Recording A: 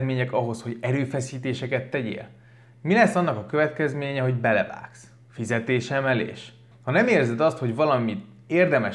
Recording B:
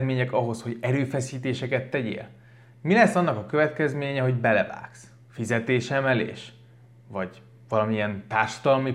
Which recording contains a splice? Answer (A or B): A